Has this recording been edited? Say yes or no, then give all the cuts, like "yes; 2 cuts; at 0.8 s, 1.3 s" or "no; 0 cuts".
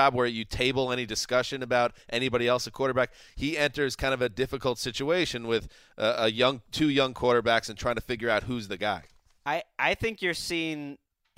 no; 0 cuts